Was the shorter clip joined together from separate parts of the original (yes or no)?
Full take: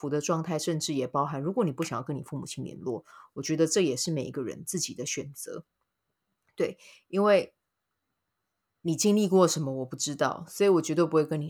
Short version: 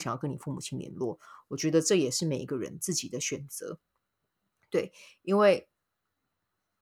no